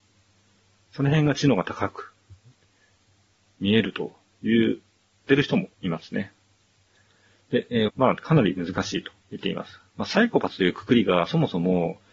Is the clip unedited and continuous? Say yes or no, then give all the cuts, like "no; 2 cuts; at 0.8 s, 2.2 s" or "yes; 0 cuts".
no; 3 cuts; at 5.7 s, 7.9 s, 9.2 s